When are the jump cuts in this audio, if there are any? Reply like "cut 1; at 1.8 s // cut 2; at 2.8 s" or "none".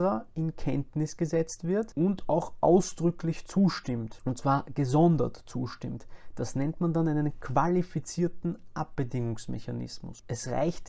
none